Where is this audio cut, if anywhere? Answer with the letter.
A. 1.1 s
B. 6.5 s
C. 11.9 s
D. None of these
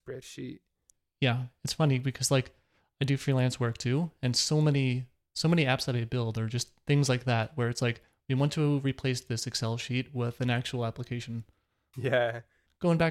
C